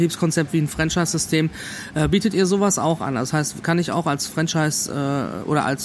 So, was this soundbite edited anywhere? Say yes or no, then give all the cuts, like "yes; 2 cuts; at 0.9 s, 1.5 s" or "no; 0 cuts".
no; 0 cuts